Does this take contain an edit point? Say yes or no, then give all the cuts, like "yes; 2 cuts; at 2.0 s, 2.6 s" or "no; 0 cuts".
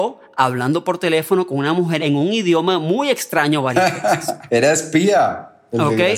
no; 0 cuts